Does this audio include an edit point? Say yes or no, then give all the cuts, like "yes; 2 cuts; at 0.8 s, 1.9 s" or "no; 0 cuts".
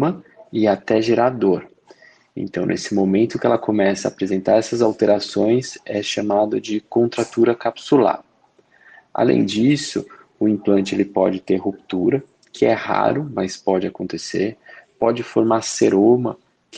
no; 0 cuts